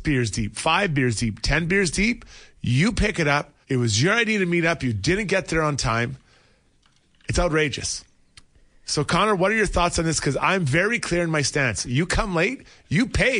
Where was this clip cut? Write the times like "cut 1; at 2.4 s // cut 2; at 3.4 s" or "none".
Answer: cut 1; at 3.6 s